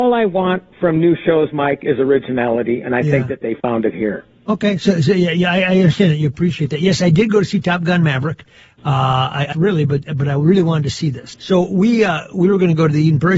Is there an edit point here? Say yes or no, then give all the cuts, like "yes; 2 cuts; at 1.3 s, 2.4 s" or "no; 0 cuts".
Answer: yes; 2 cuts; at 9.5 s, 11.3 s